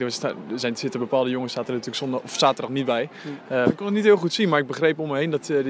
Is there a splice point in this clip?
yes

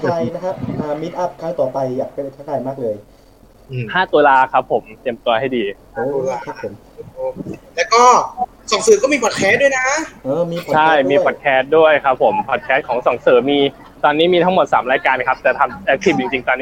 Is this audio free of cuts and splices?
yes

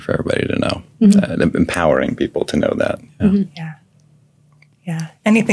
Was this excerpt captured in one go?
yes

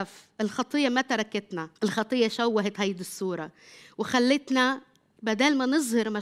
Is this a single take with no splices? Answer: no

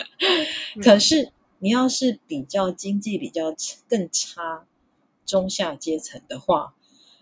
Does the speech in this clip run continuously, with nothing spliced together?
yes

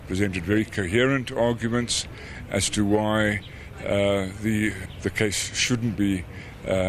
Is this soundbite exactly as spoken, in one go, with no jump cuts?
yes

